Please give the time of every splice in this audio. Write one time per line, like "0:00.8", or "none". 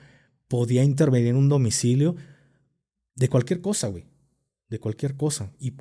none